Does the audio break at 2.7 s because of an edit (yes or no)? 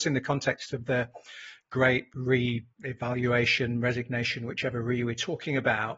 yes